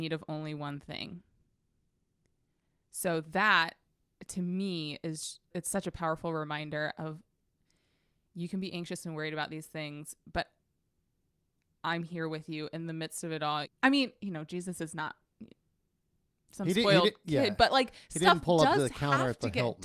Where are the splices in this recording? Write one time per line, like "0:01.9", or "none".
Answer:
0:05.5
0:13.6